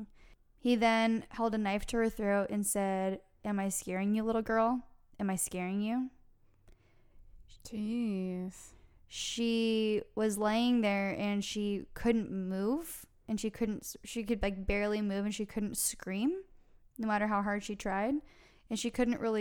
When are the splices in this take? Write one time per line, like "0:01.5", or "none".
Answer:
0:07.6